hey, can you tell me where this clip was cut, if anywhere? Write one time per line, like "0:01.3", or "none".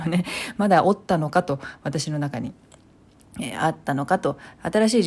none